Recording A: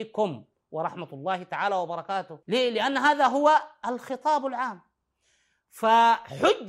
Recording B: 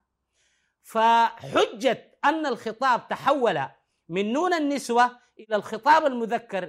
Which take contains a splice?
A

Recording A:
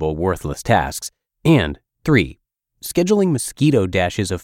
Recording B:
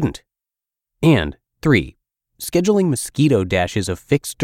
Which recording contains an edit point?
A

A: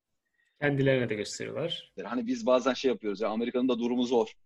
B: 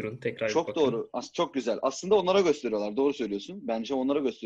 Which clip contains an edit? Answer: A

